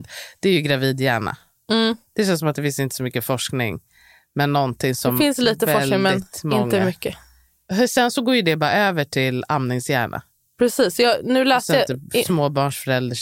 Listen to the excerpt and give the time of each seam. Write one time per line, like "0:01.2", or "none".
none